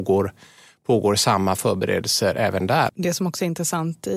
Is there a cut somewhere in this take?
yes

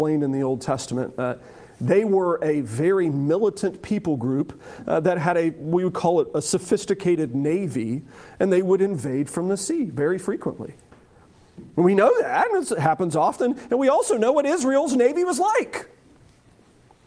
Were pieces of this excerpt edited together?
no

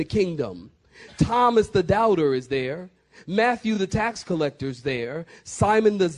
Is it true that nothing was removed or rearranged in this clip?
yes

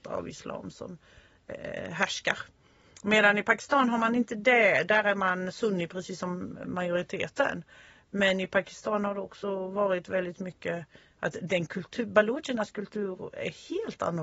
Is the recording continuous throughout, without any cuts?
yes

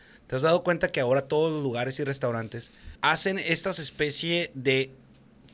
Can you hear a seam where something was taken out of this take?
yes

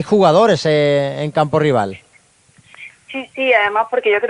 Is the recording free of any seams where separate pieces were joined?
yes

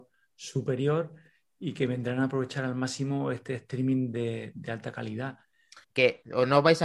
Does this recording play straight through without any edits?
no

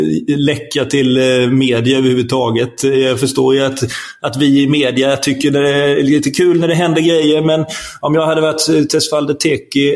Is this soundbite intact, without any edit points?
yes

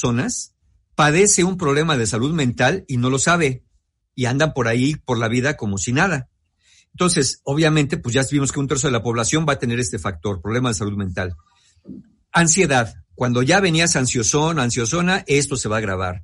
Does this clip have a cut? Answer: no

